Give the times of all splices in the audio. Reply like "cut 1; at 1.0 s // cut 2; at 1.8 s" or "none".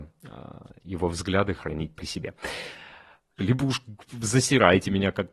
cut 1; at 3.4 s